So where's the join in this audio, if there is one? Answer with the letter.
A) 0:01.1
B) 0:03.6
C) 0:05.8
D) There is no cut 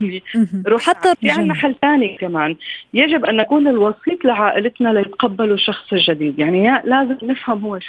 A